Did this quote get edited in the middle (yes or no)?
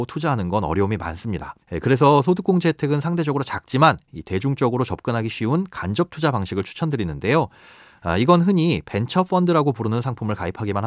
yes